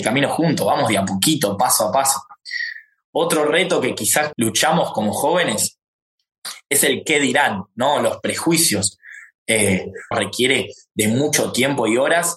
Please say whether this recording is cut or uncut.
cut